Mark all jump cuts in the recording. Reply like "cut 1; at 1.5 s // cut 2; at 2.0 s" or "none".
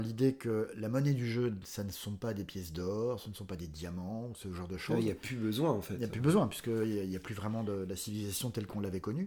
none